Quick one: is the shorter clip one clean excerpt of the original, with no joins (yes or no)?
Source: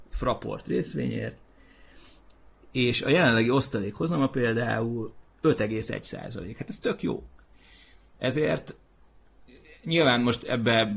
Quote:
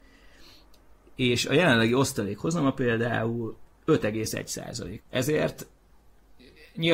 no